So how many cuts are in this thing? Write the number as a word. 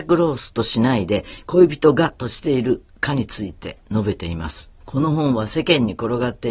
one